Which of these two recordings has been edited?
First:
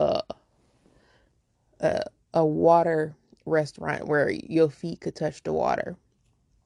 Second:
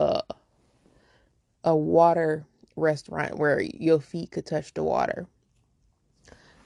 second; 1 cut; at 1.5 s

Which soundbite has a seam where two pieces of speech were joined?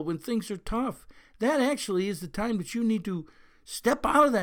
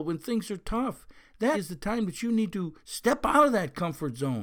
second; 2 cuts; at 1.5 s, 2.8 s

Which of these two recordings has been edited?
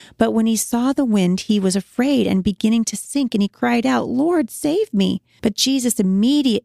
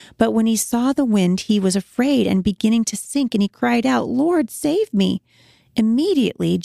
first; 1 cut; at 5.4 s

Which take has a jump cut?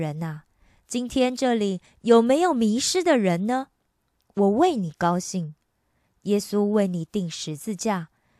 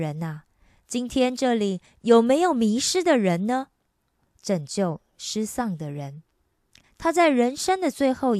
second; 2 cuts; at 4.2 s, 6.8 s

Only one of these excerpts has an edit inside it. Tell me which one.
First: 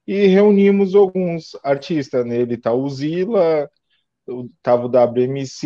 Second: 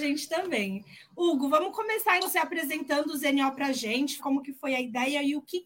second; 2 cuts; at 2.2 s, 4.2 s

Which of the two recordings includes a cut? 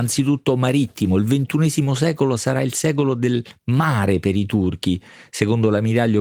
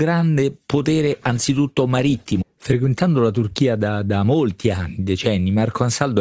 second; 1 cut; at 2.4 s

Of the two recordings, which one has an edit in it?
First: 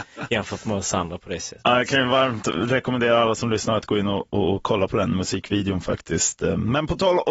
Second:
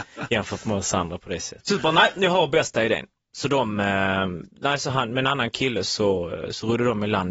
second; 1 cut; at 1.6 s

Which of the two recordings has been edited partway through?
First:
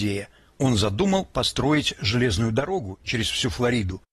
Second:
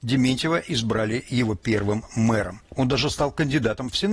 second; 1 cut; at 2.7 s

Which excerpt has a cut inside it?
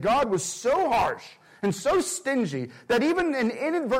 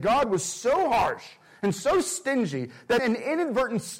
second; 1 cut; at 3.0 s

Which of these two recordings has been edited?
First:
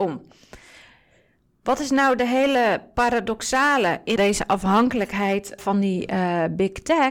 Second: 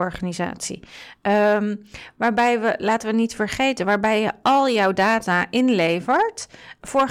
first; 2 cuts; at 4.2 s, 5.6 s

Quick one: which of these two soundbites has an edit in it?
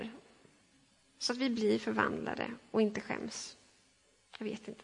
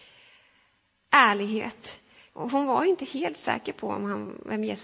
second; 1 cut; at 2.3 s

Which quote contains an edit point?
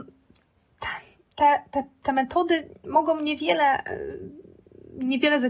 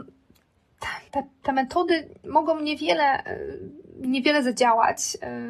second; 2 cuts; at 1.1 s, 3.9 s

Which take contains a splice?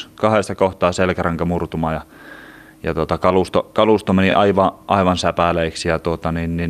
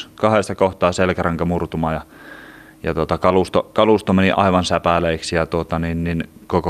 second; 1 cut; at 4.3 s

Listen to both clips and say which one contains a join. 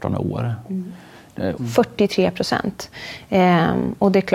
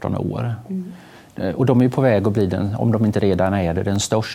first; 1 cut; at 1.6 s

